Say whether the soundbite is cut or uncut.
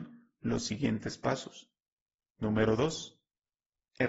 cut